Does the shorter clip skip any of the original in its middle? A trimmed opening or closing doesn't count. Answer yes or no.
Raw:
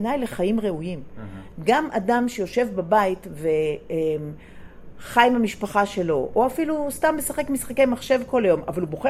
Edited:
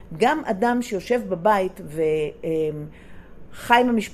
no